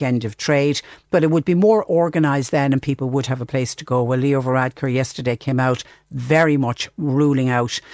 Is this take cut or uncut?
uncut